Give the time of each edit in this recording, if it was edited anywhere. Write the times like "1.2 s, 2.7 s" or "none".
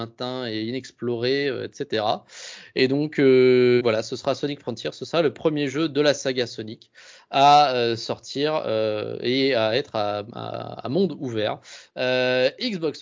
3.8 s, 11.9 s